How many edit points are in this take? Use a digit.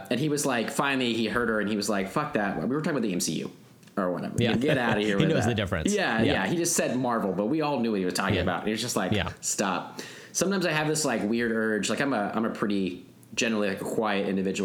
1